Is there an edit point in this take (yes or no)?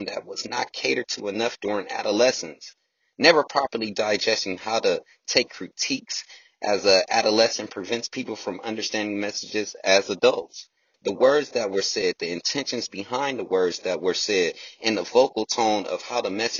yes